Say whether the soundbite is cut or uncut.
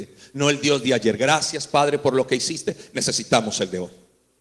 uncut